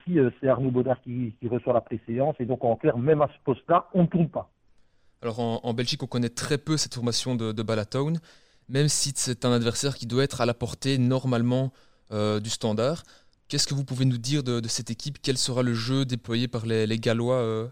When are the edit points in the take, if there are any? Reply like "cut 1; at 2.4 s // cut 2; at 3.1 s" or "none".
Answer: none